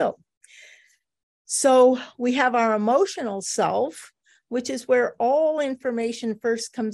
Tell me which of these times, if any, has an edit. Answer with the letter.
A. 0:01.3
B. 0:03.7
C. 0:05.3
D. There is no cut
D